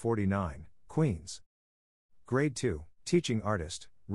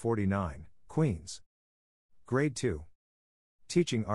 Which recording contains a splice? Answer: first; 1 cut; at 2.9 s

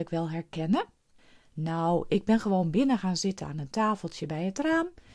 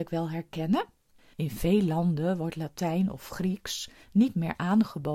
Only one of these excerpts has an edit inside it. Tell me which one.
second; 1 cut; at 1.3 s

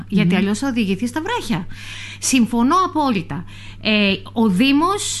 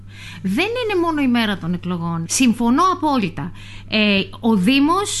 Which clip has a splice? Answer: second; 1 cut; at 2.3 s

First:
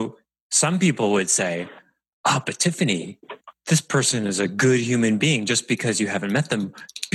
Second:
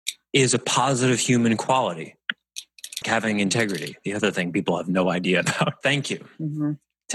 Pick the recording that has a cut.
second; 2 cuts; at 3.0 s, 5.8 s

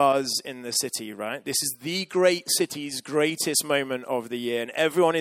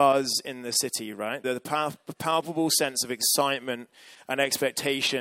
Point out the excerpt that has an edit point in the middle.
second; 1 cut; at 1.4 s

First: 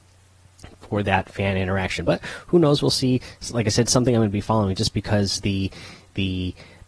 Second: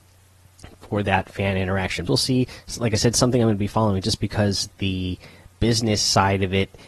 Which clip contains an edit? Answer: second; 2 cuts; at 2.1 s, 4.7 s

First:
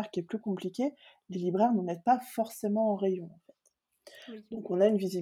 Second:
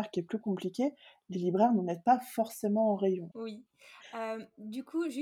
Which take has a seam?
second; 1 cut; at 3.3 s

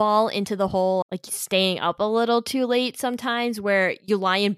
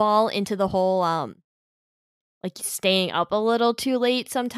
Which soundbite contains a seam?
first; 1 cut; at 1.0 s

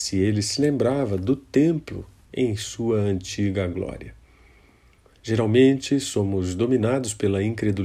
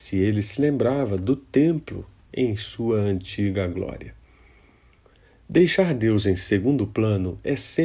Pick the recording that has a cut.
first; 1 cut; at 5.2 s

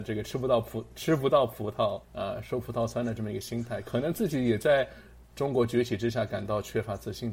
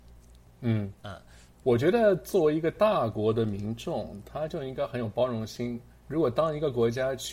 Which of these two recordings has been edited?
first; 1 cut; at 2.0 s

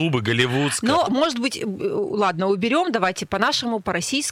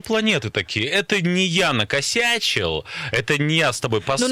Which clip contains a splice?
first; 1 cut; at 1.1 s

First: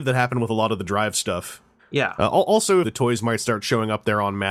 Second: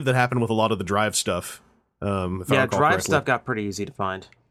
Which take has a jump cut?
first; 2 cuts; at 1.8 s, 2.8 s

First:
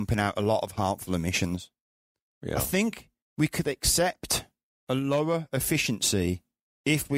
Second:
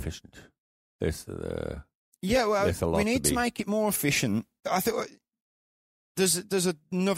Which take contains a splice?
second; 1 cut; at 4.6 s

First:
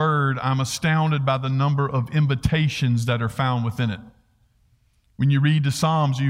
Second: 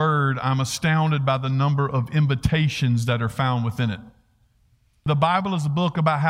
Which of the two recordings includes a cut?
second; 1 cut; at 5.1 s

